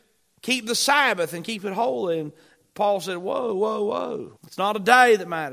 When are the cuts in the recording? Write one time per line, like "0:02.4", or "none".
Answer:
0:04.4